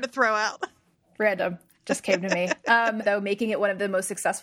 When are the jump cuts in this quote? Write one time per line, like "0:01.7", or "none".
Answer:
0:03.0